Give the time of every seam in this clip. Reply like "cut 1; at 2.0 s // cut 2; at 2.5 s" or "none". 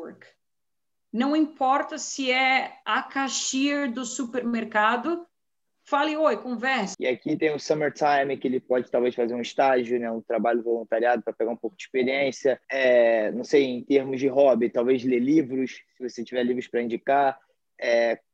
cut 1; at 6.9 s // cut 2; at 12.6 s